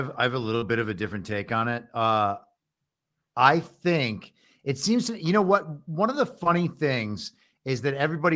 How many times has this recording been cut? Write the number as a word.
zero